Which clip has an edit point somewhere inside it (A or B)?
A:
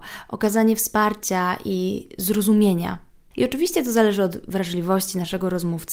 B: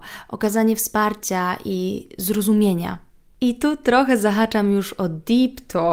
A